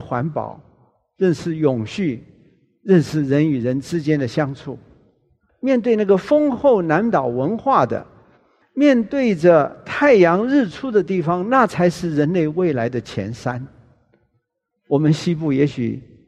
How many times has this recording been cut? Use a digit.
1